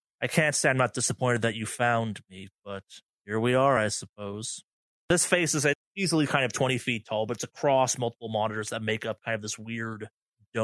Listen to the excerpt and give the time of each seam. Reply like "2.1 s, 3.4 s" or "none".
5.8 s